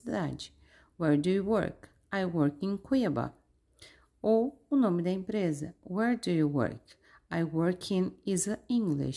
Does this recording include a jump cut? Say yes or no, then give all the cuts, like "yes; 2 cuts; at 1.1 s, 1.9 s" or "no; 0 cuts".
no; 0 cuts